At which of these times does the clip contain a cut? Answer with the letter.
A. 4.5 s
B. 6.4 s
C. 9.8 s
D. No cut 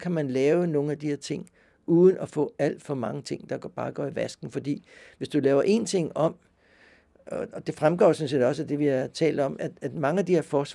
D